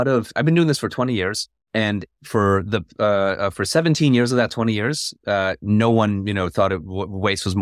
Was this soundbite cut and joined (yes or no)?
no